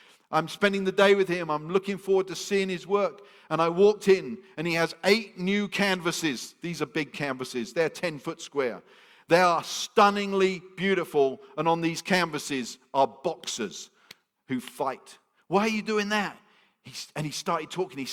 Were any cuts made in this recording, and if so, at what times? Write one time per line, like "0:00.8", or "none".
0:15.4

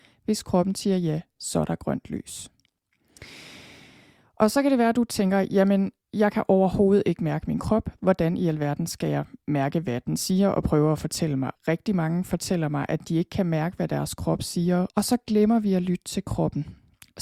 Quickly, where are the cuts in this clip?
0:11.5
0:14.9

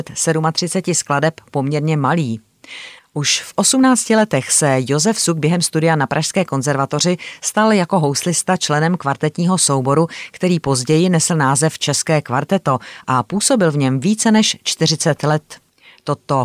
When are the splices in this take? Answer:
0:03.0

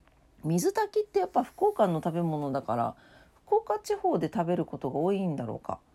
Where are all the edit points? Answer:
none

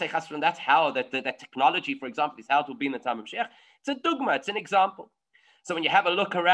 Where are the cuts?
none

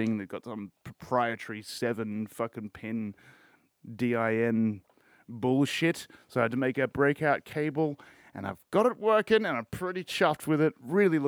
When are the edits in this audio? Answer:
none

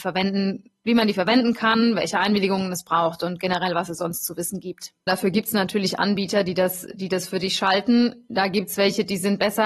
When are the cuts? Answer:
0:05.1

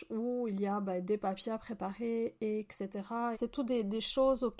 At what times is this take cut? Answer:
0:03.3

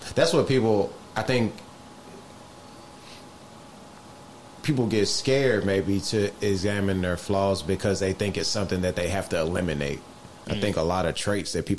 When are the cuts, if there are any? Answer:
0:10.4

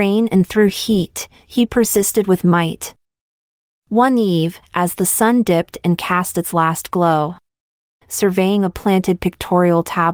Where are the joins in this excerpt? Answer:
0:03.7
0:08.0

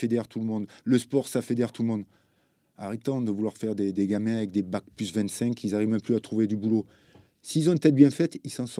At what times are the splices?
0:03.9

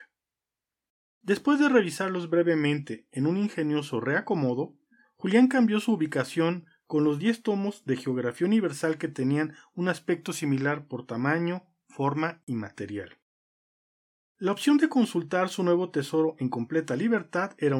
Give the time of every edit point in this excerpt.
none

